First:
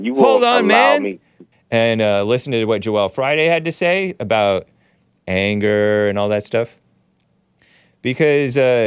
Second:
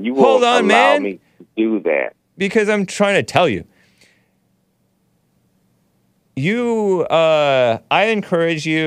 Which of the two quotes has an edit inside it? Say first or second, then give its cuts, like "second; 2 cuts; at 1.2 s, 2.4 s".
first; 1 cut; at 1.5 s